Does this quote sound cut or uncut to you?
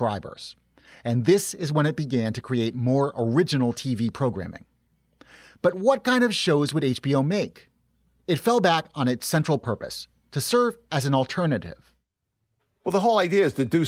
uncut